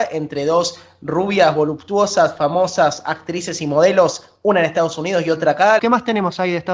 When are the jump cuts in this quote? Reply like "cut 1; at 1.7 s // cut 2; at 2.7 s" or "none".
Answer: cut 1; at 5.8 s